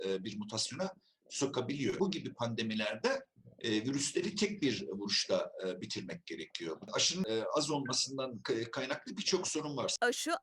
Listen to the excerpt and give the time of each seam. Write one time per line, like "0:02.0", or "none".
none

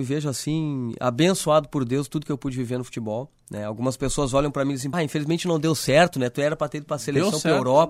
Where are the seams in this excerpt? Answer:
0:04.9

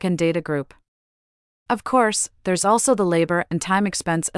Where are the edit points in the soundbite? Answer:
0:01.7

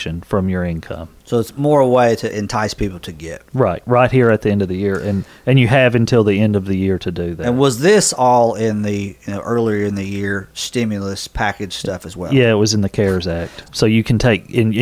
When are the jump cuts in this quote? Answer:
0:13.6

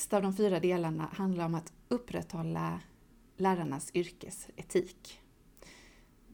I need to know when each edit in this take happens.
none

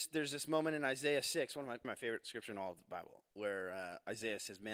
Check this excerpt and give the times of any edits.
0:01.8
0:03.3

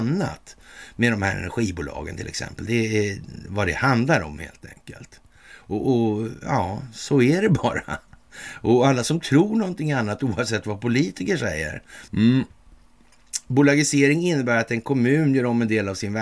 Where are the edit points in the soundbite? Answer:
0:12.1

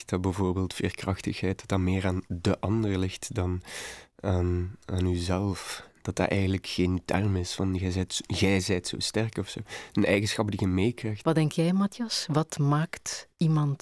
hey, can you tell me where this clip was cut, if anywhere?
0:11.2

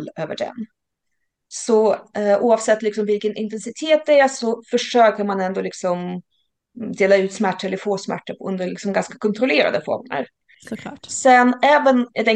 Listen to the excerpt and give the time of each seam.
0:10.5

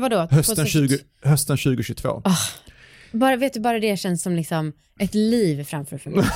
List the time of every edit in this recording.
none

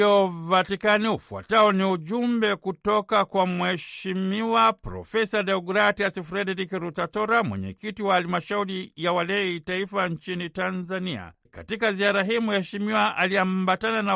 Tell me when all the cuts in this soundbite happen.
0:11.5

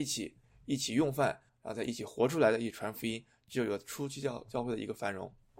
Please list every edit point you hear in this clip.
0:01.5

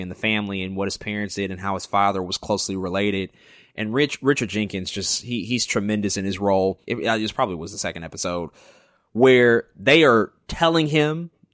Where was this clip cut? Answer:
0:06.9

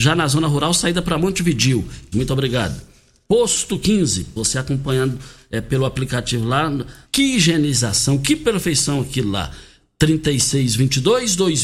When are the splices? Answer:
0:02.1
0:04.4
0:07.1

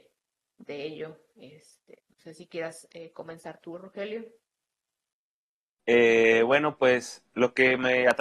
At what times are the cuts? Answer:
0:05.7

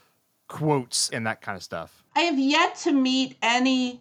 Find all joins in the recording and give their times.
0:02.1

